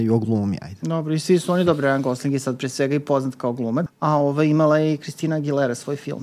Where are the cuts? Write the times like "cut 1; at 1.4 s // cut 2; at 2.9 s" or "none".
cut 1; at 3.9 s